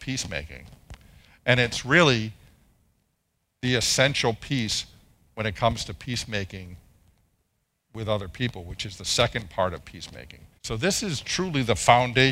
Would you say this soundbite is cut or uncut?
cut